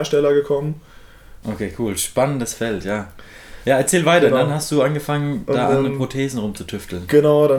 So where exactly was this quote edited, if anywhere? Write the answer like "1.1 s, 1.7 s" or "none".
1.4 s